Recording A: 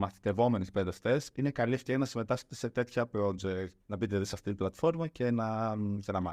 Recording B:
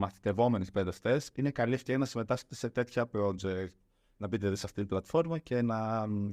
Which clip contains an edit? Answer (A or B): A